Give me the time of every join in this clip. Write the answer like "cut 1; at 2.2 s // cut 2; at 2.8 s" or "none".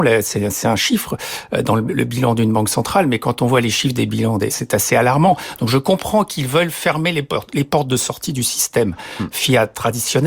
cut 1; at 4.5 s